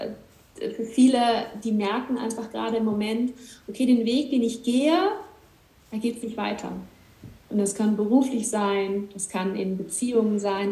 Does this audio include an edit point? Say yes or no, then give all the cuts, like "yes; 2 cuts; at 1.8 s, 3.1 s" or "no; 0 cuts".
no; 0 cuts